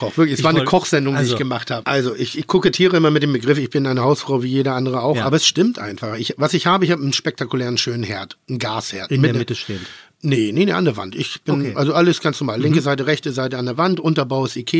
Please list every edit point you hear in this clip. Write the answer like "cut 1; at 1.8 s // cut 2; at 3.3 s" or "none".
cut 1; at 1.8 s